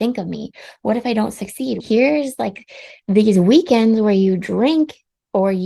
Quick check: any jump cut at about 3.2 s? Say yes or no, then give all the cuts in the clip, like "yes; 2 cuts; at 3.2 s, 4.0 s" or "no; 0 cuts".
no; 1 cut; at 1.8 s